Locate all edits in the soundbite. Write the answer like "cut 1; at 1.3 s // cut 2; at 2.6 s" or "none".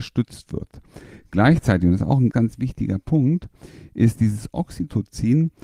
cut 1; at 2.3 s